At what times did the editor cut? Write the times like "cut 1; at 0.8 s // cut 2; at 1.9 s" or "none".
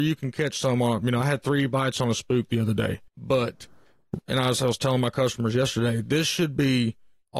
cut 1; at 3.1 s